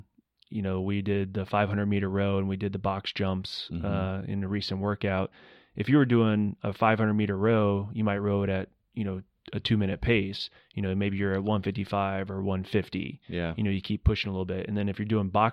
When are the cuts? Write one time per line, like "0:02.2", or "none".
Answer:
0:10.6

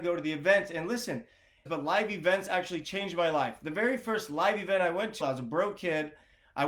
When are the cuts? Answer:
0:01.7
0:05.2

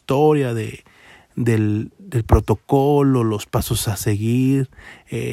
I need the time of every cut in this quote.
none

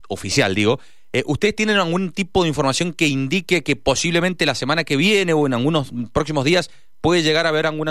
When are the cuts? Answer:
none

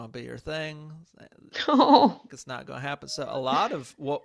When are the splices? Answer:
0:02.3

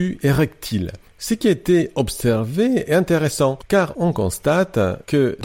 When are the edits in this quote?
0:01.0

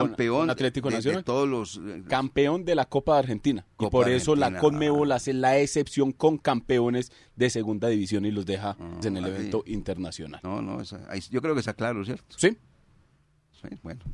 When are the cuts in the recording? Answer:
0:09.0

